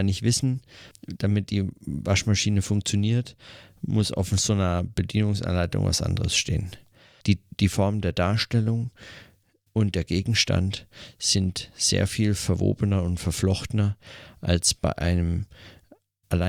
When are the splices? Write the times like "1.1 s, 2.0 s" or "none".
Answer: 0.9 s, 7.2 s